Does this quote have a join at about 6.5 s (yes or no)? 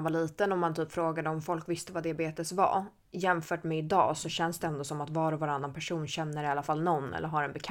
no